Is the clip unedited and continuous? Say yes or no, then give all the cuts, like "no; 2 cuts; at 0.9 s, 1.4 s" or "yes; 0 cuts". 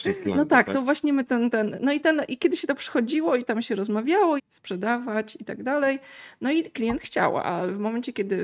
no; 1 cut; at 4.4 s